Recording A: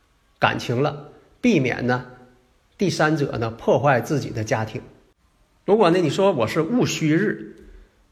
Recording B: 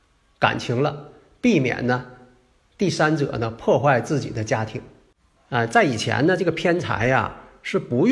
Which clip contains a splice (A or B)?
B